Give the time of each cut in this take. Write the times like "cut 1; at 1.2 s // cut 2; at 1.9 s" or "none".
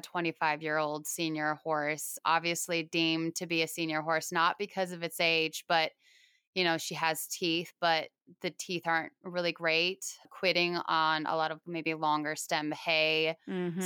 cut 1; at 11.6 s